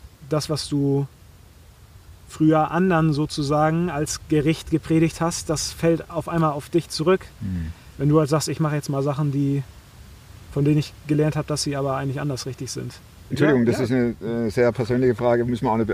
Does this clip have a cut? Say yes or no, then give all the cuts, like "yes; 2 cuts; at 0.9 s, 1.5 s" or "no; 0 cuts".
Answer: yes; 1 cut; at 13.3 s